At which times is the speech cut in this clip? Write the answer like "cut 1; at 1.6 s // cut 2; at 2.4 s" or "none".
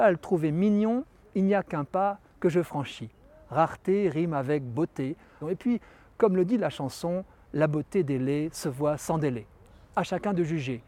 cut 1; at 5.4 s